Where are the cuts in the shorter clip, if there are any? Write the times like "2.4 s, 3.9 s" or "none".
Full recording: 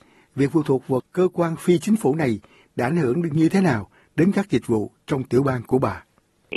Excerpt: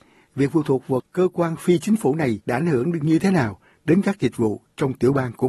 2.4 s